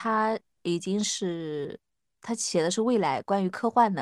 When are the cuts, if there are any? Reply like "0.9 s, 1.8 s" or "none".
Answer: none